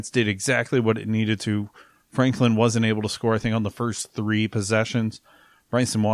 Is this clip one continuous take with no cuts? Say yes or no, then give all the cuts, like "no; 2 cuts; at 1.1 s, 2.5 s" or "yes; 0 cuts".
yes; 0 cuts